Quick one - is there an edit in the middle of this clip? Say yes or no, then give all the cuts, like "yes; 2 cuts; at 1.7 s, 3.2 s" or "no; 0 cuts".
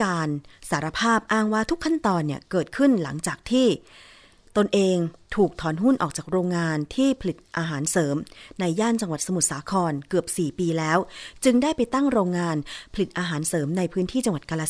no; 0 cuts